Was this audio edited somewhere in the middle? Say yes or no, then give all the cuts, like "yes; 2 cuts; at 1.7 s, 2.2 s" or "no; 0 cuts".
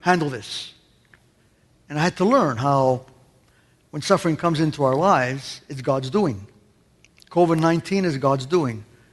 no; 0 cuts